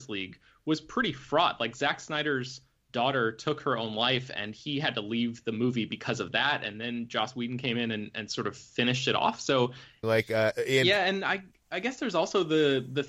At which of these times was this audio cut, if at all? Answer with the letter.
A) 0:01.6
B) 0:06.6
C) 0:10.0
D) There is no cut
C